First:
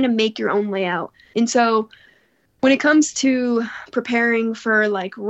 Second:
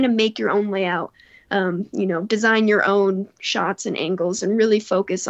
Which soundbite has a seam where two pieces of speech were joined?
first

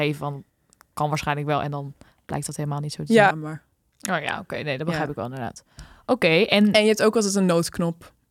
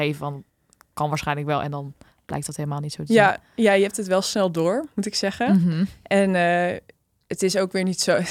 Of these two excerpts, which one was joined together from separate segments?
first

